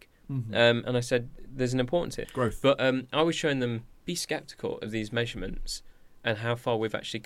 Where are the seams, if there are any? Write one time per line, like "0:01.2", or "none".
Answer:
0:02.2

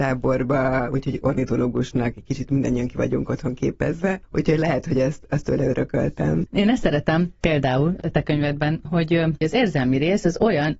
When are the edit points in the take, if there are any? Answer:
none

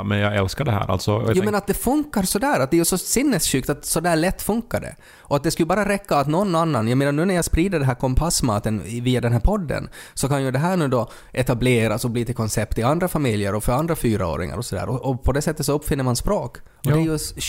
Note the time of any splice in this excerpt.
none

